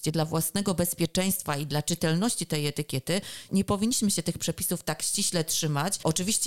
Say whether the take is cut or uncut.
cut